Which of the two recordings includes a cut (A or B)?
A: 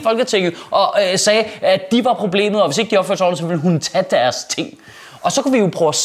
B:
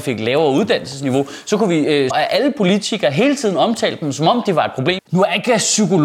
B